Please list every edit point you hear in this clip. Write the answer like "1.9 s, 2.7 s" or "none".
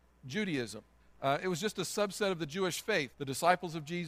1.0 s, 3.1 s